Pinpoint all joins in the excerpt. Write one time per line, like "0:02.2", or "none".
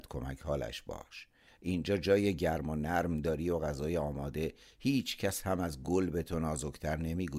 none